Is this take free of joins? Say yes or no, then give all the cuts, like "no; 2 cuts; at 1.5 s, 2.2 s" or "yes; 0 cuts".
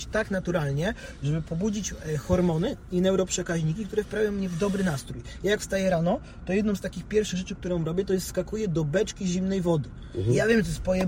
yes; 0 cuts